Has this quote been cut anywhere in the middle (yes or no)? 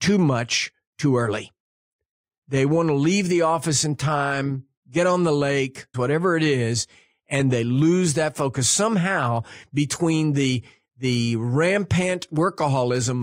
yes